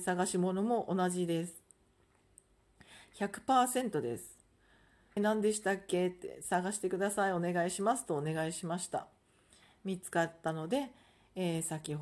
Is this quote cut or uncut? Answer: cut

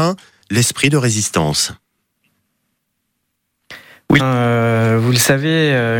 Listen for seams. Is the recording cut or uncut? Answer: cut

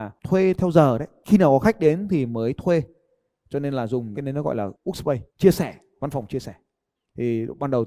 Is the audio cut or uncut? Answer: cut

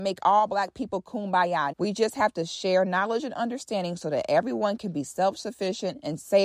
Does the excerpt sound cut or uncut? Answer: cut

